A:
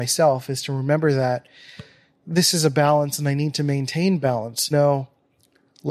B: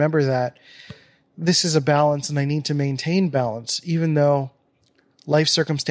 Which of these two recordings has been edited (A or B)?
A